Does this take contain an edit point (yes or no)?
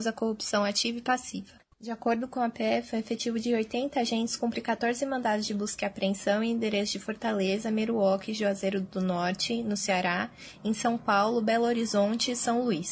yes